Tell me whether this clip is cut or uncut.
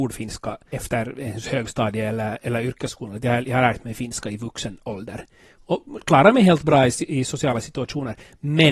uncut